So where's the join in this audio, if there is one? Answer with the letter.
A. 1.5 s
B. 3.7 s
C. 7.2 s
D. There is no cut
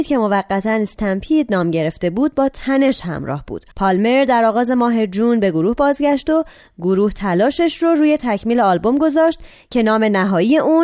B